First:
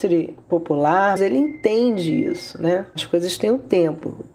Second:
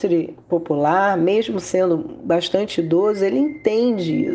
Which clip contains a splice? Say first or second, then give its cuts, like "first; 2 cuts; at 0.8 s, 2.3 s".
first; 1 cut; at 1.2 s